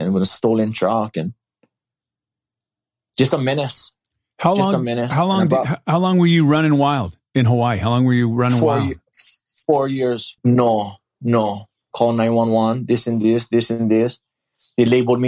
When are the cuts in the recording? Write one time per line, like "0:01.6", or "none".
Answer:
0:10.4
0:11.9